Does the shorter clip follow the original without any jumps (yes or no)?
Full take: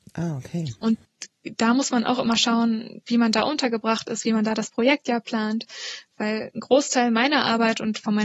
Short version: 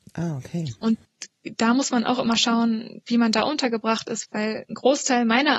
no